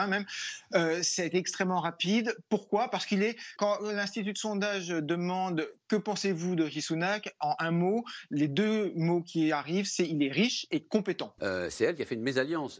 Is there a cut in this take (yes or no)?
yes